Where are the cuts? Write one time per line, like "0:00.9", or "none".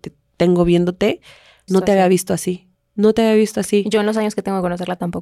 0:01.7